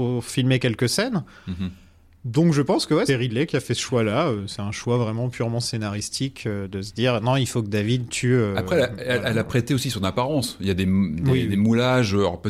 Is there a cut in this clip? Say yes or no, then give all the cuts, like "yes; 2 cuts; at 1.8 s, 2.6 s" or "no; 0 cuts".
yes; 1 cut; at 3.1 s